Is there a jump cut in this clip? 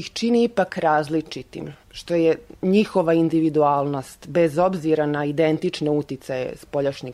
yes; 1 cut; at 1.8 s

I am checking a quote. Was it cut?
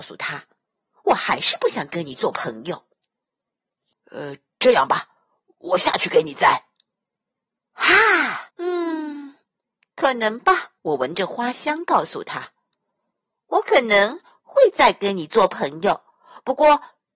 yes; 3 cuts; at 3.9 s, 8.5 s, 10.8 s

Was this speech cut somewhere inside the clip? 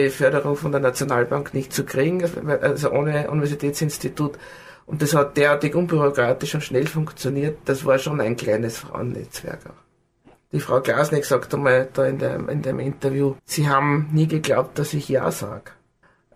yes; 2 cuts; at 10.4 s, 13.4 s

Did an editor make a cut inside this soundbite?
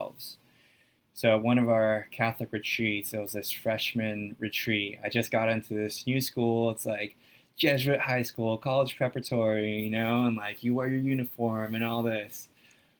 no; 0 cuts

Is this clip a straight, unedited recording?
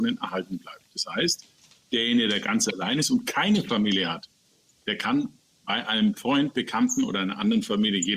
yes; 0 cuts

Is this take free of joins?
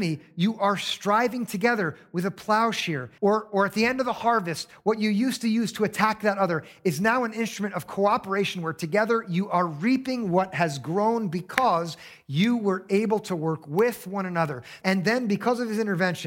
no; 2 cuts; at 3.2 s, 14.8 s

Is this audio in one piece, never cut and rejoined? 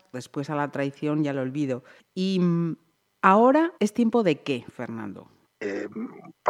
no; 1 cut; at 3.8 s

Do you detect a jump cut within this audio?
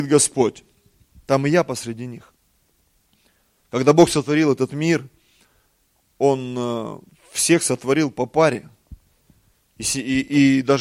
no; 0 cuts

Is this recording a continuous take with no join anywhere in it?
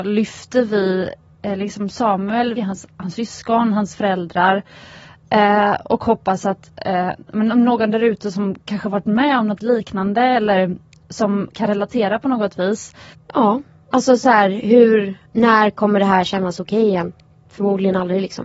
no; 3 cuts; at 2.6 s, 13.1 s, 15.3 s

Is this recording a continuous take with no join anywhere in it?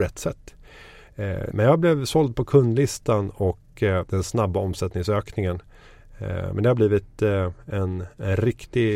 no; 1 cut; at 1.5 s

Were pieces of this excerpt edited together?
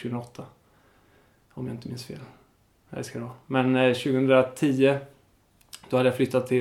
no; 0 cuts

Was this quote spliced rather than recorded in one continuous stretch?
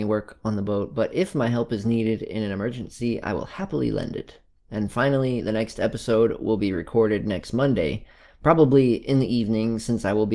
no; 0 cuts

